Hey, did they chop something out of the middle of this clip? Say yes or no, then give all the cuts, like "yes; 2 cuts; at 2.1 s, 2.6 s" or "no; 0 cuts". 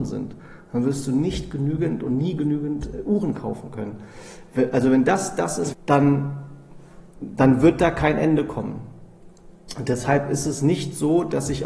yes; 1 cut; at 5.7 s